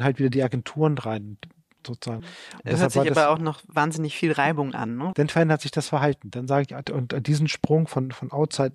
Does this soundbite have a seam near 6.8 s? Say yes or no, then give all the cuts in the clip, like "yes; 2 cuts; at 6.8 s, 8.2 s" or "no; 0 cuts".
yes; 3 cuts; at 2.2 s, 5.1 s, 6.8 s